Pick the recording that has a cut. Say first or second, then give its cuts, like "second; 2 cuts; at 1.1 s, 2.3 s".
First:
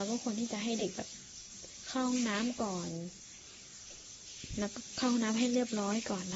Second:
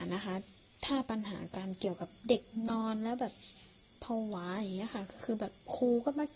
second; 1 cut; at 2.2 s